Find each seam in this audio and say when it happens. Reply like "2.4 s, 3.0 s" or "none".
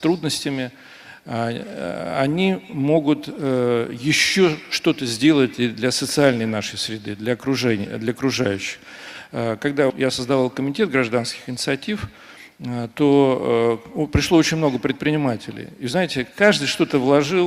9.9 s